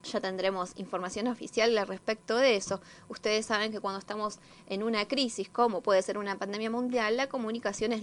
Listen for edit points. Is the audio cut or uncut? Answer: uncut